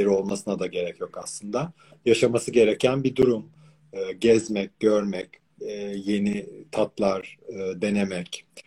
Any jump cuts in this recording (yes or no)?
no